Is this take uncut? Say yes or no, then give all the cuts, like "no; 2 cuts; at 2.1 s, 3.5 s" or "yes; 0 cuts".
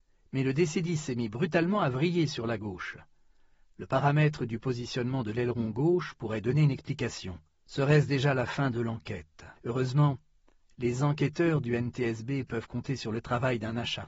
no; 2 cuts; at 7.7 s, 9.6 s